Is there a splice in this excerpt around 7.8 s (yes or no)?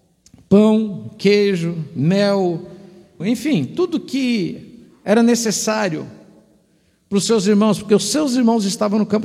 no